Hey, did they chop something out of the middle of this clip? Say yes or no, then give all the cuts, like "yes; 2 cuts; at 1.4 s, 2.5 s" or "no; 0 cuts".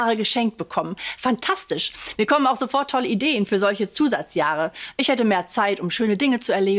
no; 0 cuts